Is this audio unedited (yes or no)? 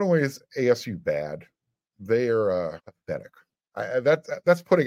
no